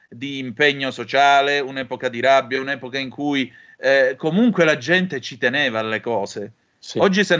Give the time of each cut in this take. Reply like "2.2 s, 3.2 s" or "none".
none